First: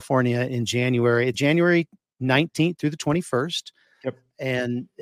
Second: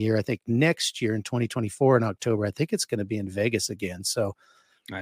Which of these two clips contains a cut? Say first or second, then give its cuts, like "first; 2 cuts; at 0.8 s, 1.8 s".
first; 1 cut; at 1.3 s